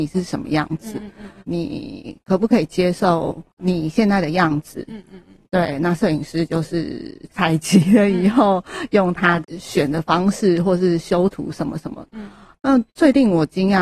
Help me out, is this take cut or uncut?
cut